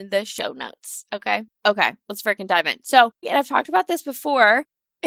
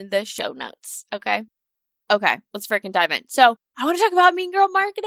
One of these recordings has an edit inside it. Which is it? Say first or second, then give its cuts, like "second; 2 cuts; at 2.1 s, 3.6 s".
first; 2 cuts; at 1.5 s, 3.2 s